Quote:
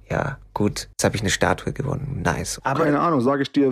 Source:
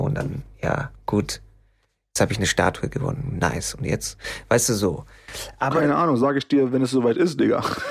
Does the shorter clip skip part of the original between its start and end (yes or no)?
yes